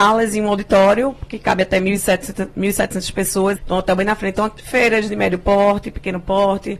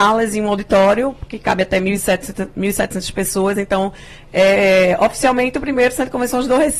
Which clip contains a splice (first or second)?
first